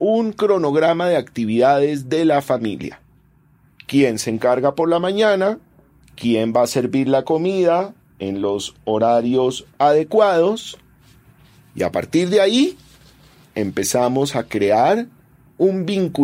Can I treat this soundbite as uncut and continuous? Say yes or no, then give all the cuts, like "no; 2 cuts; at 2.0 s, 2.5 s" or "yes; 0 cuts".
no; 1 cut; at 6.0 s